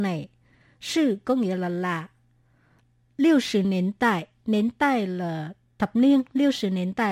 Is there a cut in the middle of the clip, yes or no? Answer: no